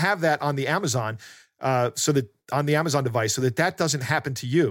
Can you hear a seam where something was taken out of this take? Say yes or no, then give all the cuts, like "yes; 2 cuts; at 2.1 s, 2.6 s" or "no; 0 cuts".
no; 0 cuts